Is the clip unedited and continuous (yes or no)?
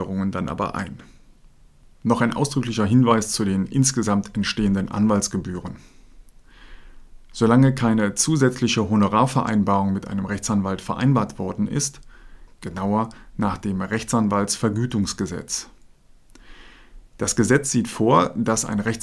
no